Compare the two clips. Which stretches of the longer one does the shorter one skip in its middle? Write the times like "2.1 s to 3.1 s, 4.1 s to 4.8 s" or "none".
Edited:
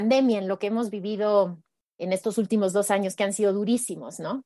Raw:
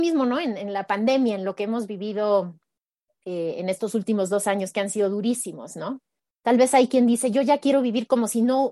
3.0 s to 3.6 s

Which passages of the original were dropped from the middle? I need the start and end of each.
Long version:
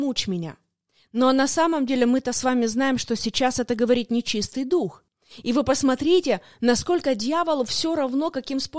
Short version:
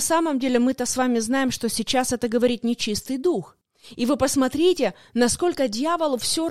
none

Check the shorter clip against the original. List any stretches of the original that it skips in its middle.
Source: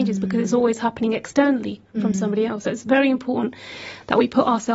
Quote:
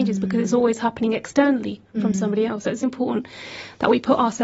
2.8 s to 3.1 s

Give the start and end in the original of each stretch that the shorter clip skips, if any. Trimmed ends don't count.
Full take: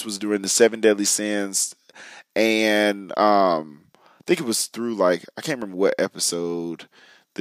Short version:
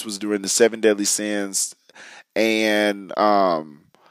none

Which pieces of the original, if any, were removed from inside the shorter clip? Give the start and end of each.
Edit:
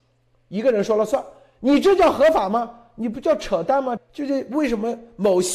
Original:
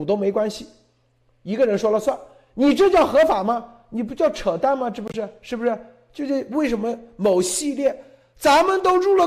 4.9 s to 6.0 s

